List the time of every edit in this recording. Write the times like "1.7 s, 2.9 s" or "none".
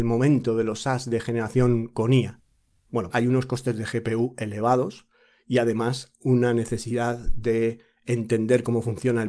none